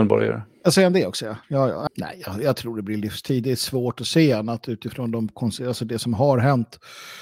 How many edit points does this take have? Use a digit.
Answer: 1